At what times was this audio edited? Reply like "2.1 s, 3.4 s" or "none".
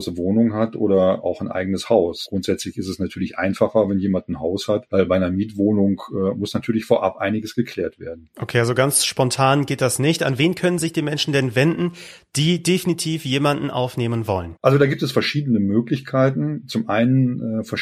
none